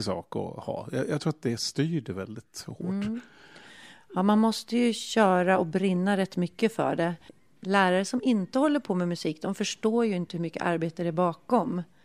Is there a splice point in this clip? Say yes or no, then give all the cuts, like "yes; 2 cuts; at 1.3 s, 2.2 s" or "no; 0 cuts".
no; 0 cuts